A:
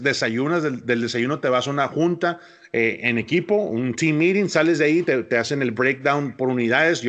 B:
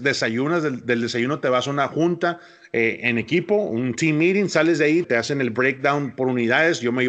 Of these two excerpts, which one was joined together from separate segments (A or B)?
B